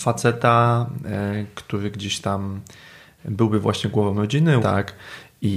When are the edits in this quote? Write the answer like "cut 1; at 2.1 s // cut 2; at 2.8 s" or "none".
cut 1; at 4.6 s